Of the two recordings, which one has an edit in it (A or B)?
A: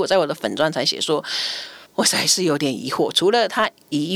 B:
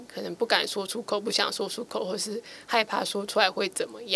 A